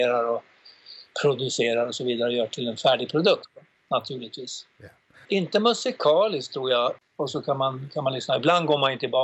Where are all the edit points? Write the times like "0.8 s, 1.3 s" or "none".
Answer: 5.2 s, 7.0 s